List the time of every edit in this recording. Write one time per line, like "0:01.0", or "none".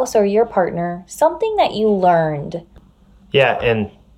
none